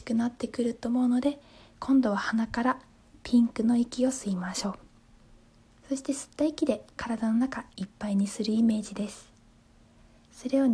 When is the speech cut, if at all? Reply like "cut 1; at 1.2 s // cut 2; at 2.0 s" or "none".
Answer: none